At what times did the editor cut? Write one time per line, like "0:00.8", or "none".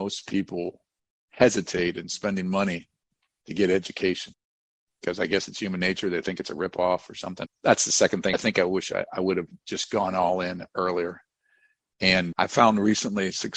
0:07.5